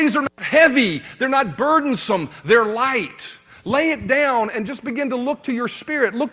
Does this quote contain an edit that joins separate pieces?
no; 0 cuts

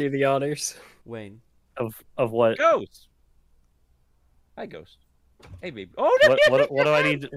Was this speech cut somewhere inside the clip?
no; 0 cuts

